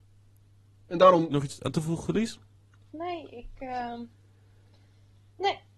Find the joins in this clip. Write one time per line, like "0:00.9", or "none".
none

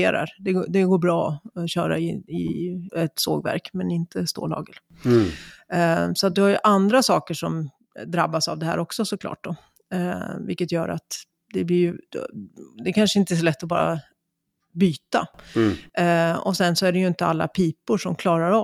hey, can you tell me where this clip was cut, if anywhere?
0:02.9

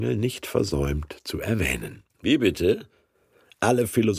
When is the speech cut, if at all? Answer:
0:02.1

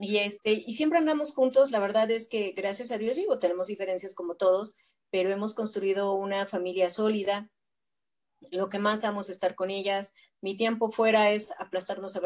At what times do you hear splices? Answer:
none

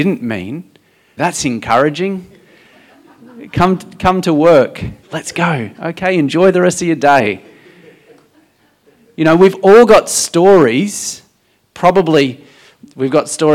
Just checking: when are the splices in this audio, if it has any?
0:01.2
0:05.0

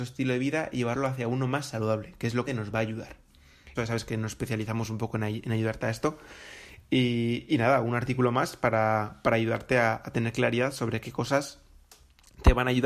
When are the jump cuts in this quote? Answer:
0:02.5
0:03.8

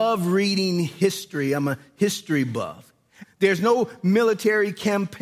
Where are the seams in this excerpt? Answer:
0:03.2

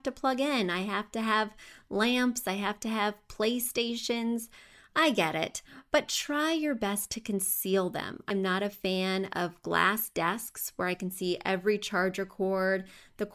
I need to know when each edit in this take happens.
0:08.3

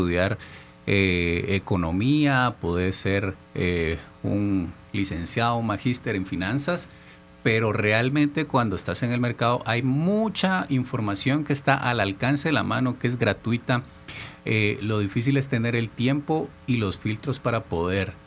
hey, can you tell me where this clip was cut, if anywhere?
none

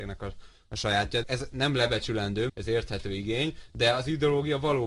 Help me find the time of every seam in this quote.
0:01.2
0:02.5

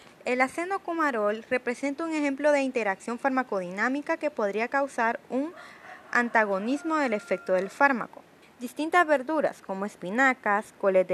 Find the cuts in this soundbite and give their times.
0:08.4

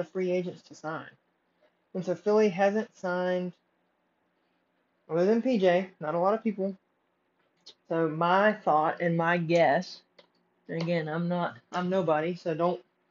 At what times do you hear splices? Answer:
0:07.8

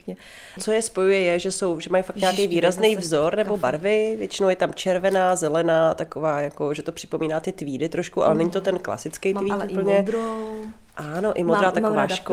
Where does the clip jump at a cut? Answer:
none

